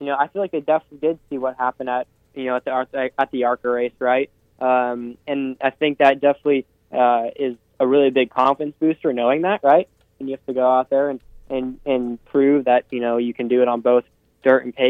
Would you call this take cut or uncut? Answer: cut